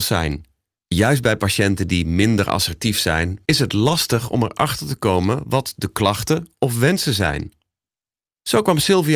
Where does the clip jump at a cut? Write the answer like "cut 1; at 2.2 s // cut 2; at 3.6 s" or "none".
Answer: cut 1; at 3.4 s